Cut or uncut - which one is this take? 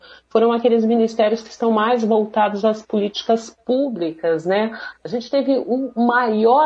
cut